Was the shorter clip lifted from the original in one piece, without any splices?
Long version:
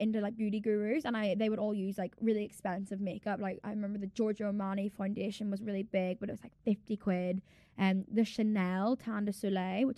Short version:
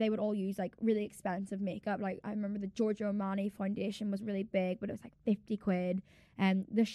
yes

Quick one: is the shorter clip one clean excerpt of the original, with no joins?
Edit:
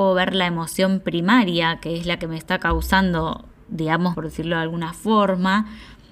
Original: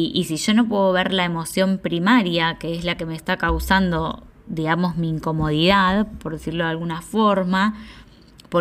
no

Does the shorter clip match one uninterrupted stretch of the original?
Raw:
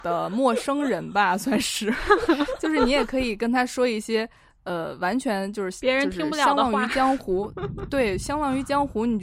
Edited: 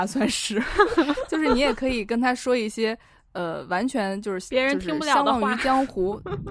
yes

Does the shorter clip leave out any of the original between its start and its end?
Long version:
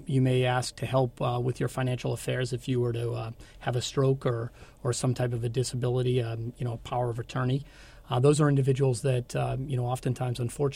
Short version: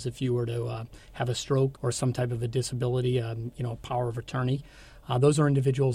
yes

